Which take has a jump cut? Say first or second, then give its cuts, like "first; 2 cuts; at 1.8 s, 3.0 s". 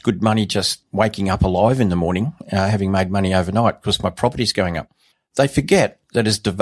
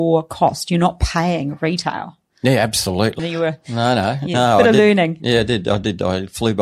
second; 1 cut; at 3.2 s